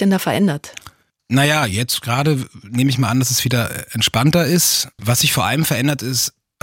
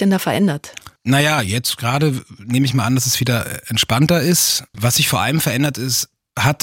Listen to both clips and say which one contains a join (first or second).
second